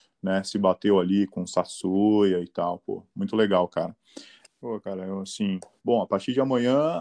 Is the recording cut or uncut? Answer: cut